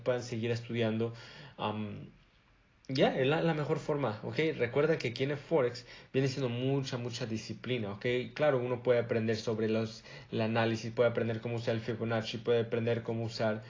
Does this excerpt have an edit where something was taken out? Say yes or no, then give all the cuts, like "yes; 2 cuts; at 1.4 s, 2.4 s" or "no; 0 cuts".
no; 0 cuts